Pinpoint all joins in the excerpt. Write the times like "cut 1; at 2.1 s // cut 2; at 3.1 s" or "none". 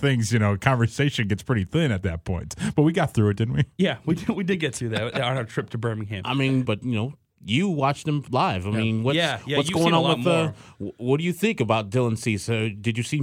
cut 1; at 6.7 s